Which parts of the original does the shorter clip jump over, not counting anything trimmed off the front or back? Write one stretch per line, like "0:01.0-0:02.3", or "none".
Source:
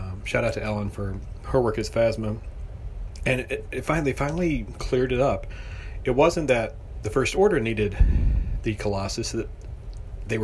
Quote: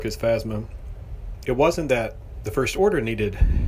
0:03.2-0:06.0